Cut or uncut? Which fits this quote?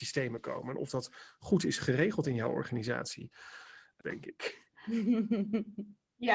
cut